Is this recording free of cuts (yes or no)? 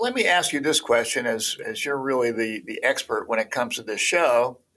yes